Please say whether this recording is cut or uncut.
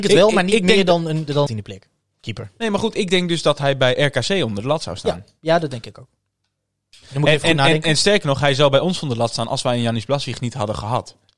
cut